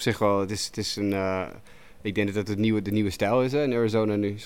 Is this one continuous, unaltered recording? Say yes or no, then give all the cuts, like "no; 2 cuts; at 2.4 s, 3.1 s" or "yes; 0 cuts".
yes; 0 cuts